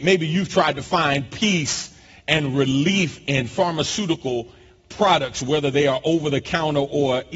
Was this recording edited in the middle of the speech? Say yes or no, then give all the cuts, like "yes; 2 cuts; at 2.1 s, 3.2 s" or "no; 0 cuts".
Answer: no; 0 cuts